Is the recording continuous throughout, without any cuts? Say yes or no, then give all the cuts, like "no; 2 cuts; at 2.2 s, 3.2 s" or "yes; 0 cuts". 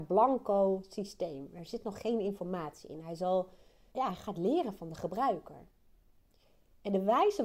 no; 1 cut; at 3.9 s